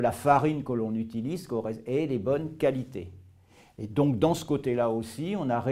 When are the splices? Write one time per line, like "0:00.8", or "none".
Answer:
none